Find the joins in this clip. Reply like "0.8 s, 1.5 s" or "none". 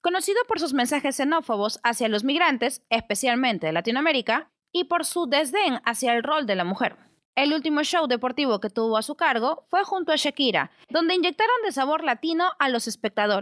7.2 s, 10.9 s

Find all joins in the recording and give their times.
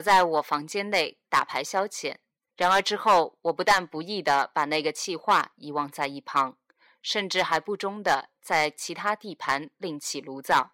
2.5 s

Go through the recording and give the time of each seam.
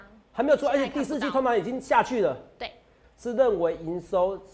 3.0 s

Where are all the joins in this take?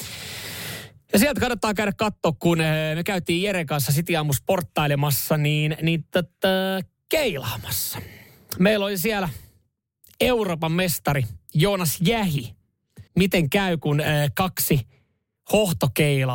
13.1 s

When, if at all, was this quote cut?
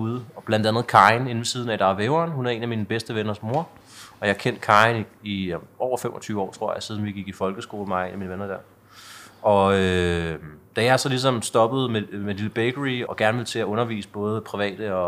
13.1 s

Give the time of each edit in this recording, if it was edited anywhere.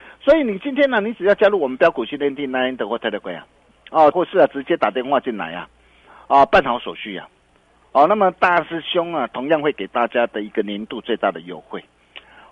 4.1 s

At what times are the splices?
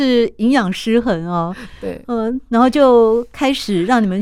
none

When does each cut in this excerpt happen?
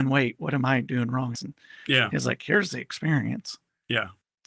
1.3 s

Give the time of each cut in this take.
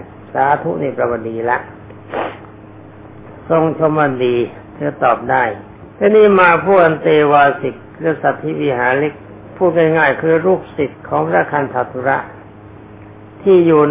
5.9 s

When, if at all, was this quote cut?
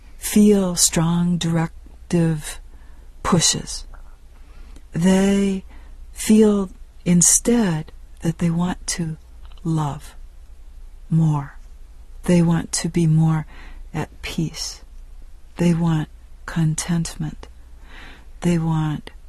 none

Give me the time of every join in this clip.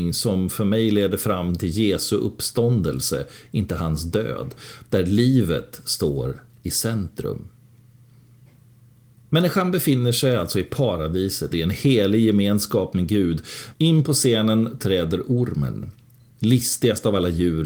11.5 s, 13.7 s

